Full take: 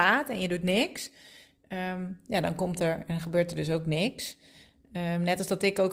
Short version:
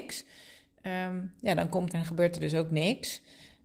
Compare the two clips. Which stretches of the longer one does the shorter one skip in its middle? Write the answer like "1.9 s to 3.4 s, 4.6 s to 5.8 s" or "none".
2.8 s to 3.0 s